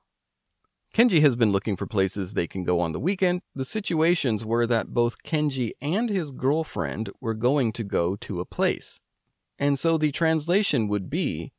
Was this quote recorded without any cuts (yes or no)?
no